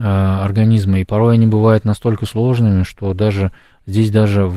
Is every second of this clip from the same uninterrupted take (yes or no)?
yes